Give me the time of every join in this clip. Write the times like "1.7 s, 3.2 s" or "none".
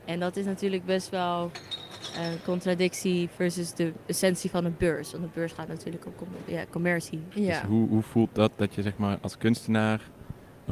7.3 s